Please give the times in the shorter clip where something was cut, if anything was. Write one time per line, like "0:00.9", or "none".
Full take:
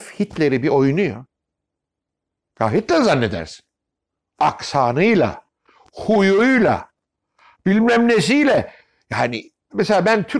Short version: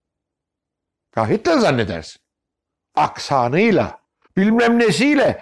0:04.2